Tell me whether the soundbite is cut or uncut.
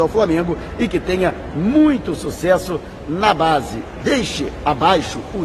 cut